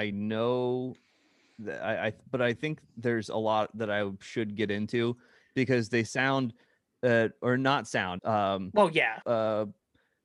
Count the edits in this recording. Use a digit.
2